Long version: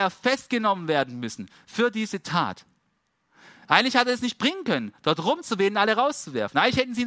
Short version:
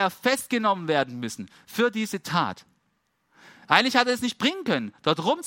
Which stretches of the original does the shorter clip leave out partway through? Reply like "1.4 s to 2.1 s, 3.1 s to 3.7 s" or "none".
none